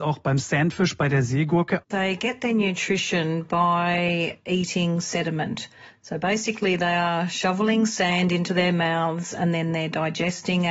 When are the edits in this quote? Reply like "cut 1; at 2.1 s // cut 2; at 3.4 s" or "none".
cut 1; at 1.8 s